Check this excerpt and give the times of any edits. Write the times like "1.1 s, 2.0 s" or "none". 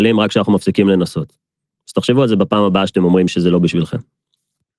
none